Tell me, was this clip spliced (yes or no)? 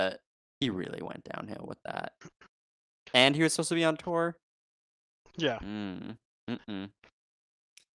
no